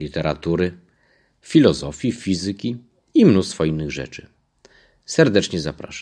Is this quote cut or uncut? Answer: uncut